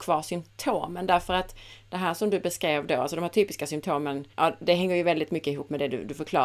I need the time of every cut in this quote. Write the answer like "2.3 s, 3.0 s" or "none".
4.3 s